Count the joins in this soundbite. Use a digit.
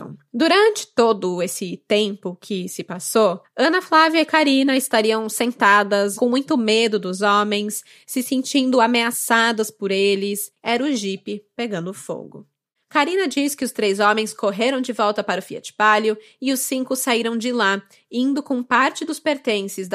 2